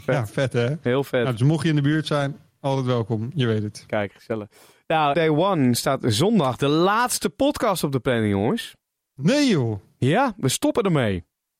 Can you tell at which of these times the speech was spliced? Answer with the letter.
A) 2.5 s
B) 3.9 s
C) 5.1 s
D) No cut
C